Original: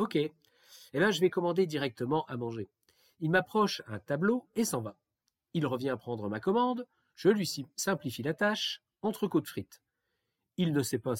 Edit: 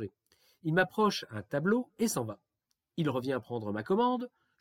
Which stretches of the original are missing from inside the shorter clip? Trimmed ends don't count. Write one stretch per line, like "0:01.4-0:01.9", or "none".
none